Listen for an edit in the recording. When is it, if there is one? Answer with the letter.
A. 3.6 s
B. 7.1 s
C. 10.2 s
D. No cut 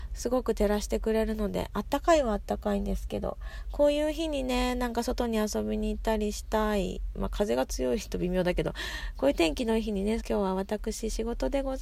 C